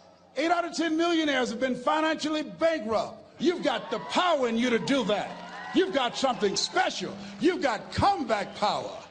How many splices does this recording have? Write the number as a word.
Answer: one